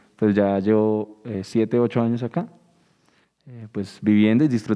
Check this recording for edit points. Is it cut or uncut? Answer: uncut